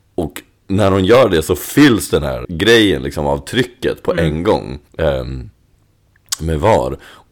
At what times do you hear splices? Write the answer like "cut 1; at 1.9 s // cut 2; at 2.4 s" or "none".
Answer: cut 1; at 2.4 s // cut 2; at 4.9 s